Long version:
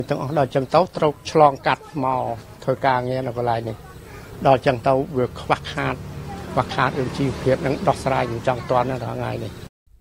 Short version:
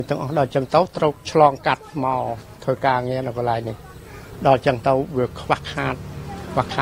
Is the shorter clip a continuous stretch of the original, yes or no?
yes